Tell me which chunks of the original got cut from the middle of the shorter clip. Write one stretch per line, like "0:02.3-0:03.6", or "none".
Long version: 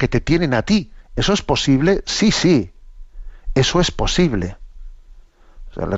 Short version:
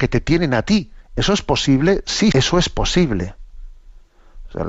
0:02.3-0:03.5